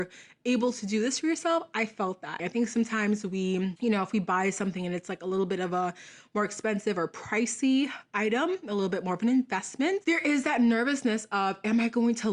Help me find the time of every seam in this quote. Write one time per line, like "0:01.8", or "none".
0:02.4